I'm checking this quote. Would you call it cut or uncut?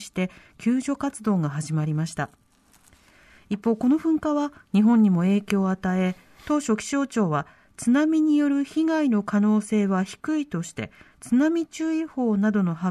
uncut